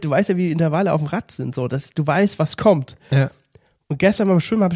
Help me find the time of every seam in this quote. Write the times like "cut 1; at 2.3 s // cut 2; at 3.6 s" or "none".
none